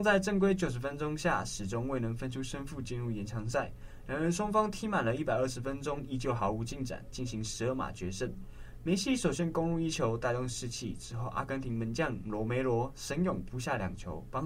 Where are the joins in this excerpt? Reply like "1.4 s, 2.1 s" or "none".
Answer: none